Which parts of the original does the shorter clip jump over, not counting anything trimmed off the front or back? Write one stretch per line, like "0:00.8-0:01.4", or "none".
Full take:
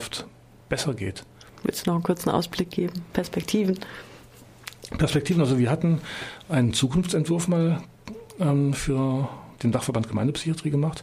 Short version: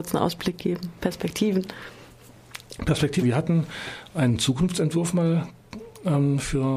0:05.3-0:05.6